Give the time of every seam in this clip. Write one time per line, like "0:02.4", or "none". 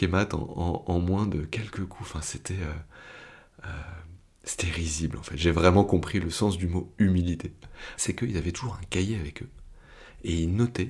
0:08.0